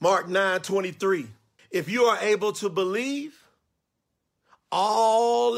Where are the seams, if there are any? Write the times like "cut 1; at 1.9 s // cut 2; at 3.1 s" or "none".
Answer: cut 1; at 1.6 s